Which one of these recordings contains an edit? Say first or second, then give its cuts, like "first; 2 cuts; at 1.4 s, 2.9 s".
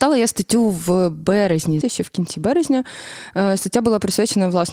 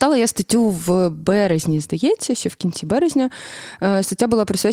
first; 1 cut; at 1.8 s